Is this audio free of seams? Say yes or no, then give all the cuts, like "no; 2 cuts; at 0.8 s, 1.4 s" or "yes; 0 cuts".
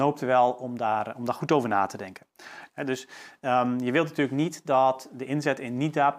no; 1 cut; at 2.7 s